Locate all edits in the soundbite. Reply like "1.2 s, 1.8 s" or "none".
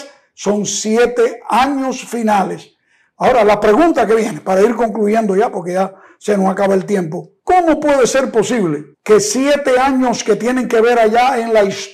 7.4 s, 8.9 s